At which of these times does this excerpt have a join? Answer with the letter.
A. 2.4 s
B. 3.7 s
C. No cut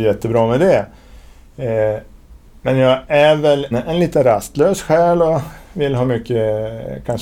B